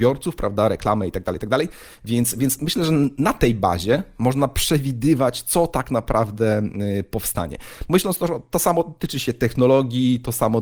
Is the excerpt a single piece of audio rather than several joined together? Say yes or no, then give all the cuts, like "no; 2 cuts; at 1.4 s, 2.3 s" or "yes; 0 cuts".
yes; 0 cuts